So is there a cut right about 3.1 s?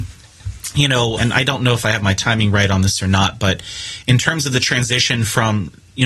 no; 1 cut; at 1.2 s

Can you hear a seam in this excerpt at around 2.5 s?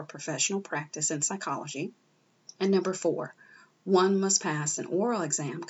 yes; 1 cut; at 2.5 s

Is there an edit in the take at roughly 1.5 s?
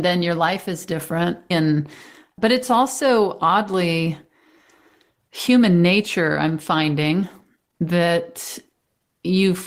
yes; 1 cut; at 1.5 s

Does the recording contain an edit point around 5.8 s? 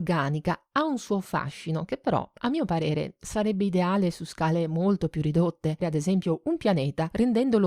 yes; 1 cut; at 5.8 s

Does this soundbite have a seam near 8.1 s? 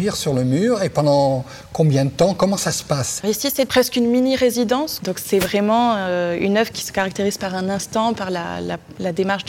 no; 2 cuts; at 3.2 s, 5.0 s

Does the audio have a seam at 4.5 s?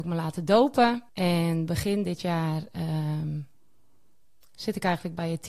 no; 1 cut; at 1.1 s

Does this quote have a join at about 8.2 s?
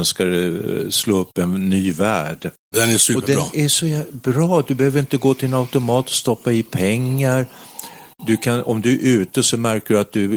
no; 1 cut; at 2.7 s

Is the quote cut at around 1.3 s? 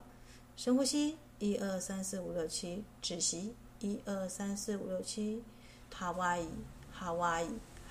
no; 1 cut; at 5.9 s

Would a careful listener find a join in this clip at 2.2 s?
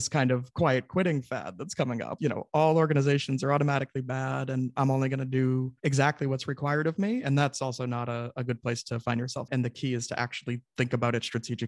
yes; 3 cuts; at 2.2 s, 5.8 s, 9.5 s

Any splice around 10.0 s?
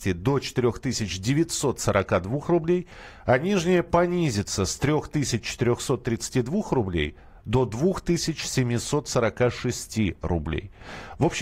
no; 0 cuts

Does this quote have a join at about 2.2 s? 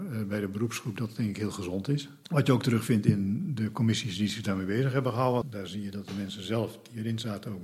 no; 1 cut; at 5.4 s

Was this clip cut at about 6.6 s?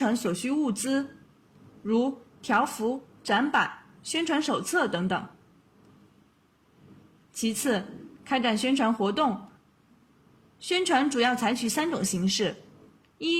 no; 0 cuts

